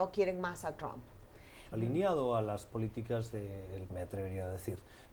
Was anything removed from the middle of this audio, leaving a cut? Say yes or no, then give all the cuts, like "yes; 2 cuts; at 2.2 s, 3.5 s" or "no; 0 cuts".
yes; 2 cuts; at 1.7 s, 3.9 s